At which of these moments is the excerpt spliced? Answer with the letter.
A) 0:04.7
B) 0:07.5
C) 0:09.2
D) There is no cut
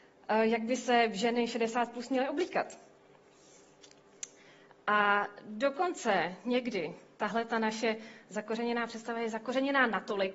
A